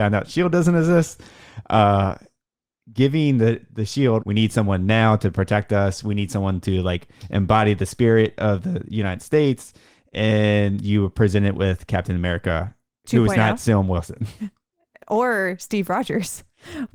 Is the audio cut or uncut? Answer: cut